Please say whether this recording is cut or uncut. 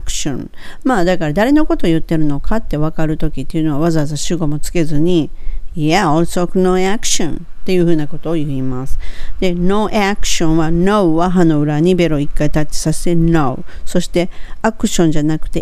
uncut